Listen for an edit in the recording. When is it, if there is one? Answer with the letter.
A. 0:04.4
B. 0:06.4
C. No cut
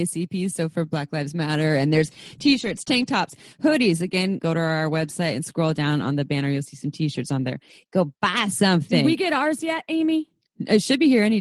A